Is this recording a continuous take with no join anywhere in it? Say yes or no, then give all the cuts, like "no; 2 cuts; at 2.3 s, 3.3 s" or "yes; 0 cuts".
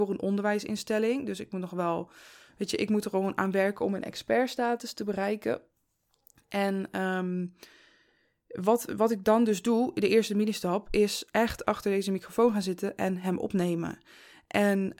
yes; 0 cuts